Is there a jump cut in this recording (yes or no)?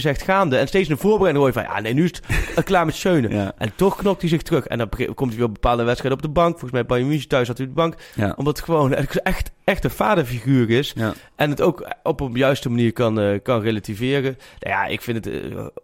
yes